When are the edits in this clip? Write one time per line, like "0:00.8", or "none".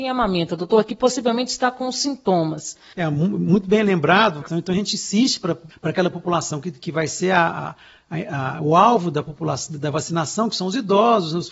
0:02.9